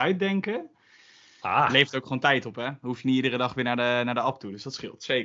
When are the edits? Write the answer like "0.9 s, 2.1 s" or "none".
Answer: none